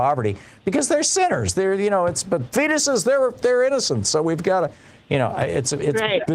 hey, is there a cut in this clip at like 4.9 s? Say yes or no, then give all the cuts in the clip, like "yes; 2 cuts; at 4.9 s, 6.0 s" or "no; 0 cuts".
no; 0 cuts